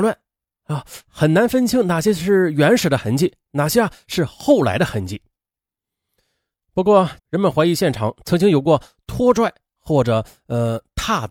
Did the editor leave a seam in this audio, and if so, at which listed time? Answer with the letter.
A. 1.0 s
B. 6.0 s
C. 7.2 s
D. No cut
C